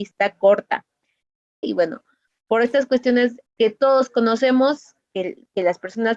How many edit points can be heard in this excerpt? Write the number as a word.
two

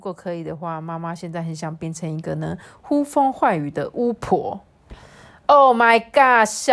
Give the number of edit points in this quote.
zero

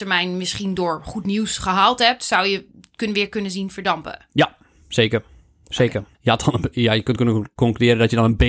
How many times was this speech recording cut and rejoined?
one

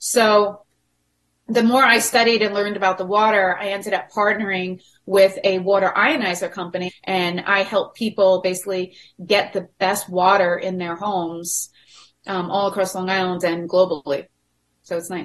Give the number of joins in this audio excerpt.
one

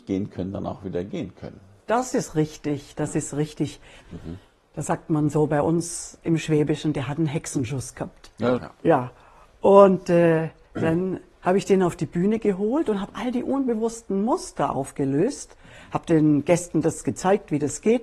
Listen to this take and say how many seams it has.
two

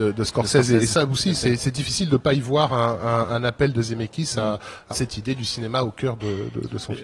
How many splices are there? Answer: one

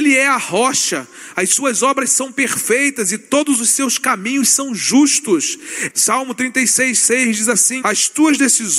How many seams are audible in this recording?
two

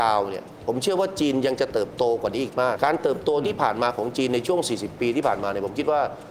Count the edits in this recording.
one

